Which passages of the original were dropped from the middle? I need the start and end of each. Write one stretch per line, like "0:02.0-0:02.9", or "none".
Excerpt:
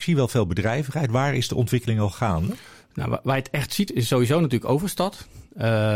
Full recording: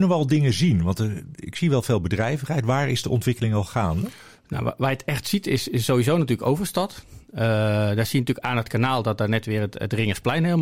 0:05.4-0:05.6